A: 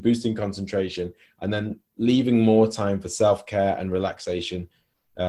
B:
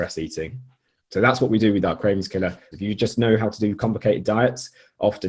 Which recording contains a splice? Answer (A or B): B